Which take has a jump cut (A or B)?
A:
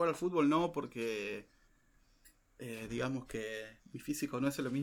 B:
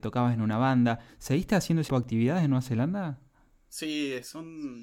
B